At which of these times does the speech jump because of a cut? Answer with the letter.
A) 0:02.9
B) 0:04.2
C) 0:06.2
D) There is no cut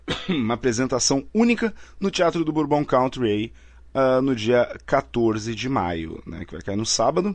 D